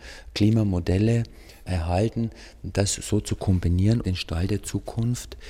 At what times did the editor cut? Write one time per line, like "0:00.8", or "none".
0:04.0